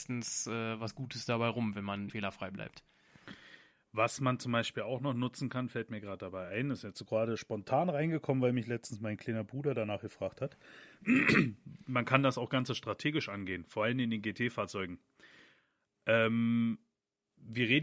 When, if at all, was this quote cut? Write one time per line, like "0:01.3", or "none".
0:02.1